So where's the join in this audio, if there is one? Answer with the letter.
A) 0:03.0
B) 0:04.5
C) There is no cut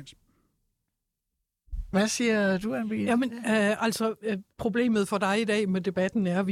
B